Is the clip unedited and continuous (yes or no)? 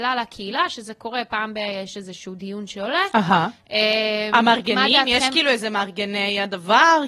yes